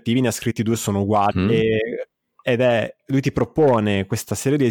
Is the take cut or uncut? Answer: cut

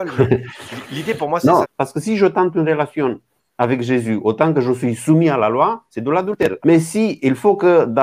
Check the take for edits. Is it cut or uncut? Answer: cut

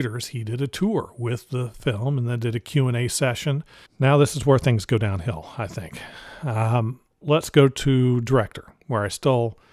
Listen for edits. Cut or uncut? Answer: cut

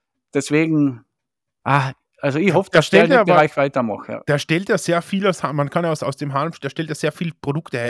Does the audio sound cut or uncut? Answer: uncut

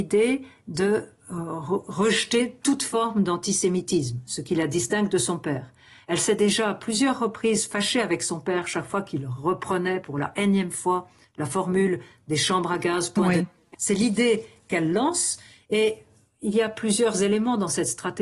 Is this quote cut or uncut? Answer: cut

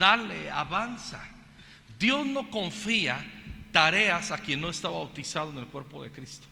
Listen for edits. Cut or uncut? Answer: uncut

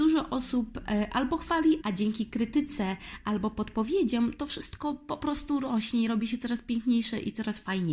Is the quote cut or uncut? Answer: cut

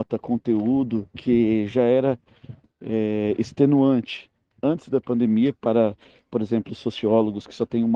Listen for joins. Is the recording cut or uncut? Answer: uncut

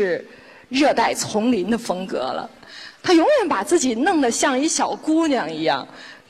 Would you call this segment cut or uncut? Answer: uncut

